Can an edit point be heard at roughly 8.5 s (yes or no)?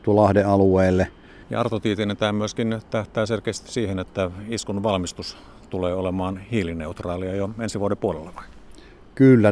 no